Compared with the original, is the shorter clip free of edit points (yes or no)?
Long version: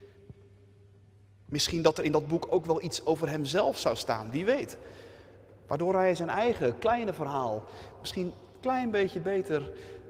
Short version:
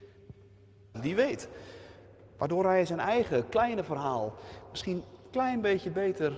no